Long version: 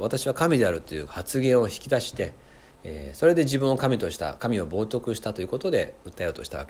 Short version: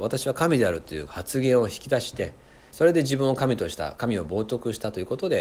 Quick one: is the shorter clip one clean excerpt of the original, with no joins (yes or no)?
no